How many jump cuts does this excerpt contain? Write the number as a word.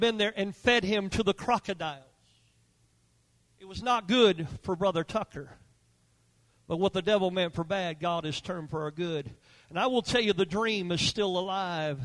zero